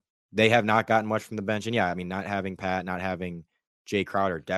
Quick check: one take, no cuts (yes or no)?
yes